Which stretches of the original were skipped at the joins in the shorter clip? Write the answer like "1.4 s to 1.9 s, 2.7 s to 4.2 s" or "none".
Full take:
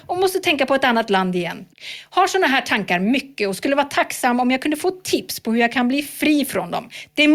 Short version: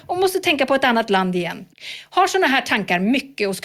none